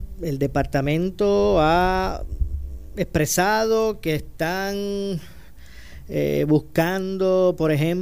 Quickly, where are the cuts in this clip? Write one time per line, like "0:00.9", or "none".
none